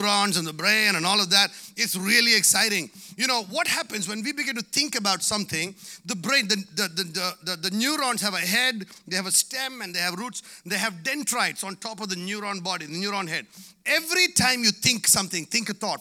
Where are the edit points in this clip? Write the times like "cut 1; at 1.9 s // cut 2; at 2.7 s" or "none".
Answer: none